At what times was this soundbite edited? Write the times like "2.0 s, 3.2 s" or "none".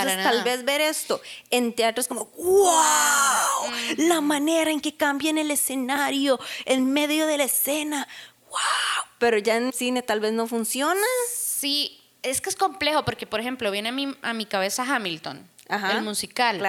9.7 s